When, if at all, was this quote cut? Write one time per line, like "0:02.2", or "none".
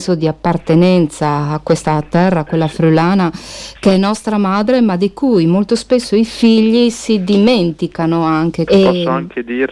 0:08.7